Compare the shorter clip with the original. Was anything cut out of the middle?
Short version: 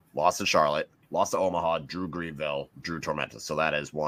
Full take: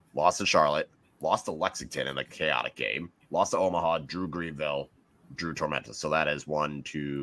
yes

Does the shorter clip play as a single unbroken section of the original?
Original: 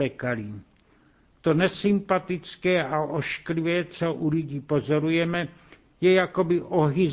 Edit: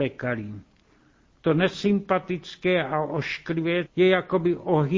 no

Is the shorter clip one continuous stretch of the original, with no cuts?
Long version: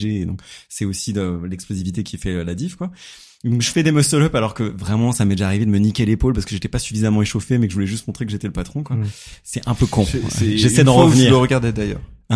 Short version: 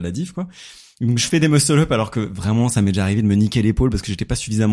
yes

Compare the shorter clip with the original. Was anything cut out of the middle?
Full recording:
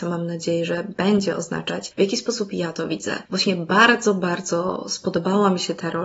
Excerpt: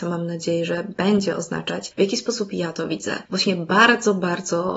no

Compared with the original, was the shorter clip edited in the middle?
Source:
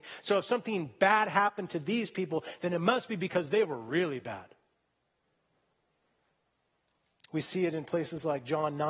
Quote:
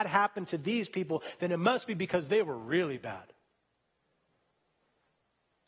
no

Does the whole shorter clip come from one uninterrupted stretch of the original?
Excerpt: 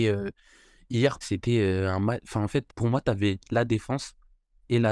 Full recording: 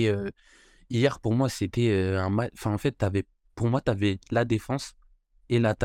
no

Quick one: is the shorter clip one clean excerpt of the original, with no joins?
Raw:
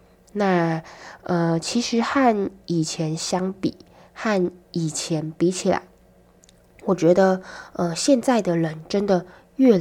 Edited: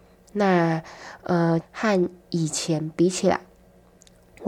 no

